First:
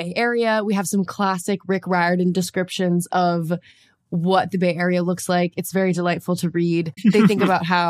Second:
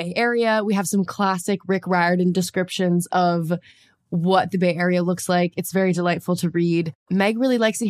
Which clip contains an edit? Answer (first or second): first